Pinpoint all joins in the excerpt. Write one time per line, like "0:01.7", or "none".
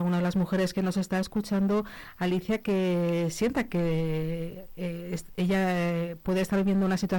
none